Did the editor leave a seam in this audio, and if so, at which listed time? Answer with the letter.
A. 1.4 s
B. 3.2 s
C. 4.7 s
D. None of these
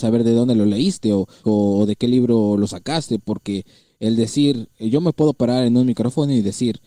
A